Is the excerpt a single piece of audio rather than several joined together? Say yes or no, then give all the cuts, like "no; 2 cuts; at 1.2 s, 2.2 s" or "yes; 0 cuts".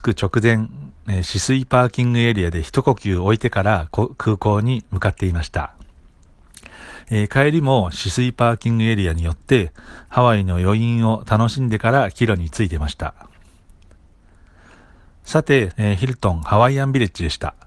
no; 1 cut; at 15.7 s